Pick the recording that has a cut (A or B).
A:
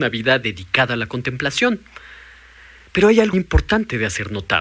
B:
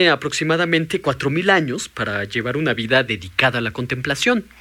A